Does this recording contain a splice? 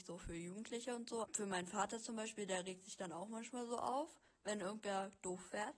yes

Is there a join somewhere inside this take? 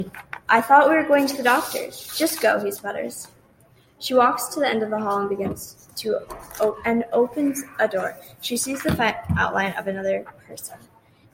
no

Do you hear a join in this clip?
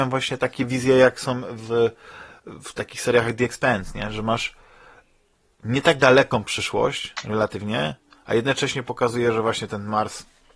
no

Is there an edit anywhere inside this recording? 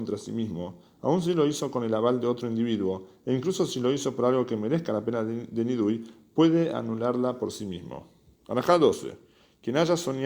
no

